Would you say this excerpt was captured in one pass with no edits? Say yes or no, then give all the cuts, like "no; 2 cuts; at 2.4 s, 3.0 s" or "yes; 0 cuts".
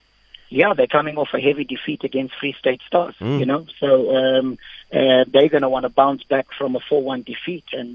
yes; 0 cuts